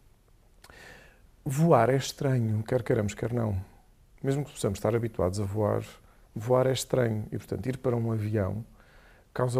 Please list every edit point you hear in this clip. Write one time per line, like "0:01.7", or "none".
none